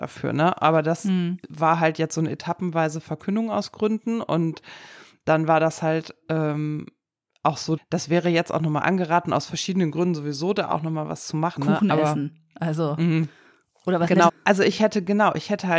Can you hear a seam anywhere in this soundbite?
yes; 3 cuts; at 7.8 s, 11.6 s, 14.3 s

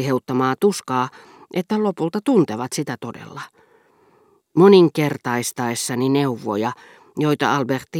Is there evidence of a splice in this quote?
no; 0 cuts

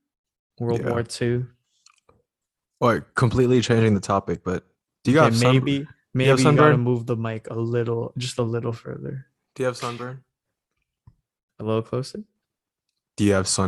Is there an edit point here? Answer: no; 0 cuts

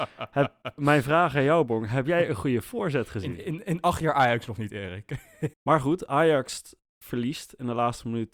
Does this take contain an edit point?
yes; 1 cut; at 5.5 s

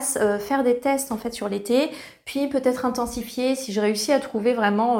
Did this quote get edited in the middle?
no; 0 cuts

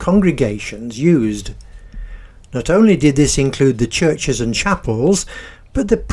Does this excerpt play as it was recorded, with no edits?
yes; 0 cuts

